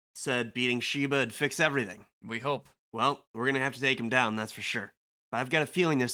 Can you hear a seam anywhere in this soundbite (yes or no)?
no